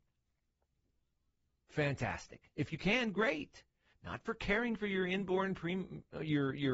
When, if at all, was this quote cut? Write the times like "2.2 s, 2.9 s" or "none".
3.9 s